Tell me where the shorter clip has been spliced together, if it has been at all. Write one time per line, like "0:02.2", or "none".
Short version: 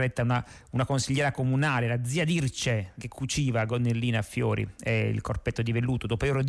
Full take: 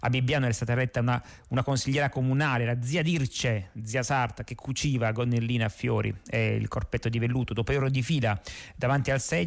0:03.0